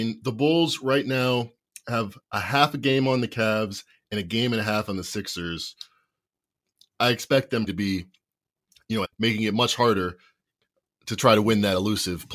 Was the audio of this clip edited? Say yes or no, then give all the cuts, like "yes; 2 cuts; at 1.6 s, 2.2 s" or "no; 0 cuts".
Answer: yes; 2 cuts; at 7.7 s, 9.0 s